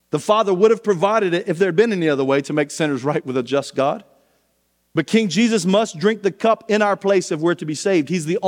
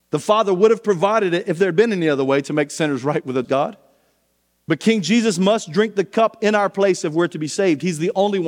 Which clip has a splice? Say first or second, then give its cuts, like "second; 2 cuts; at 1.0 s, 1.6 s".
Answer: second; 1 cut; at 3.4 s